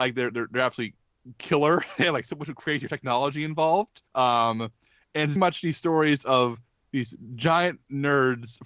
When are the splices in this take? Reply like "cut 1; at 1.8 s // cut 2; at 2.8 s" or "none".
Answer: cut 1; at 4.1 s // cut 2; at 5.4 s